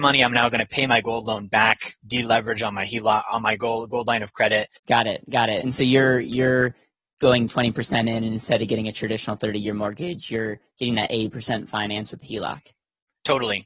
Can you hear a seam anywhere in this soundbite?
yes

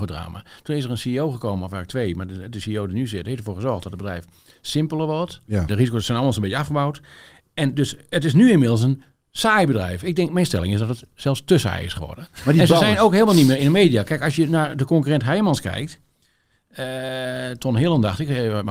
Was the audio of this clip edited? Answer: yes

